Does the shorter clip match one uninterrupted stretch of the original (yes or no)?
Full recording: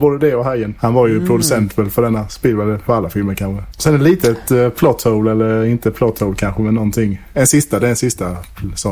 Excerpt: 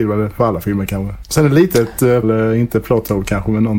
no